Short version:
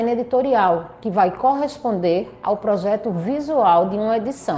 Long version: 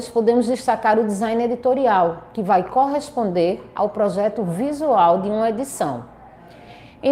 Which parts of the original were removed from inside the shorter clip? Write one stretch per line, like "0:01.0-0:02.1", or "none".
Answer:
none